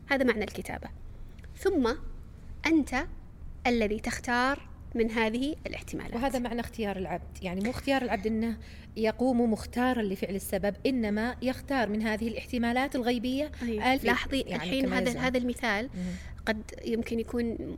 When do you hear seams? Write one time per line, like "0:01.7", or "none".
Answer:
0:14.0